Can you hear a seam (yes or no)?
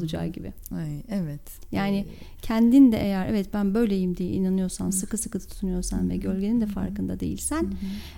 no